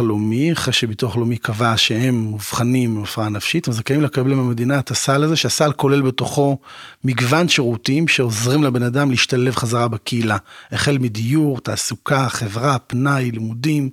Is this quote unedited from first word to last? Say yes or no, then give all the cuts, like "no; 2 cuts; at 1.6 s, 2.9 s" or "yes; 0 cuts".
yes; 0 cuts